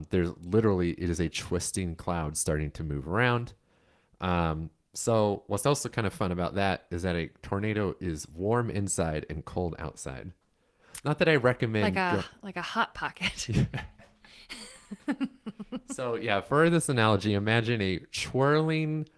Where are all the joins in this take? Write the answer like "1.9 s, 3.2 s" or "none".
none